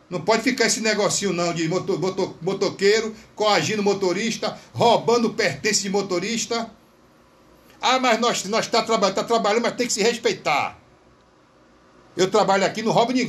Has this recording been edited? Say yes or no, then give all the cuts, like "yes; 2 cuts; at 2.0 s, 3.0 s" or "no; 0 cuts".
yes; 1 cut; at 8.4 s